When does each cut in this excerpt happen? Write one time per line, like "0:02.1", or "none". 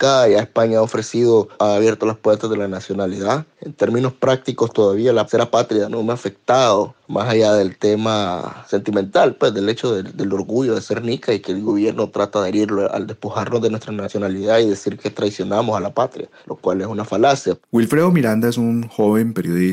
none

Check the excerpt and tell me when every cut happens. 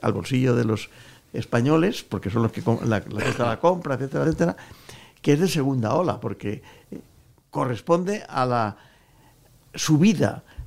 none

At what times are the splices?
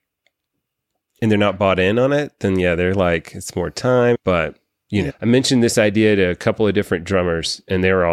0:05.1

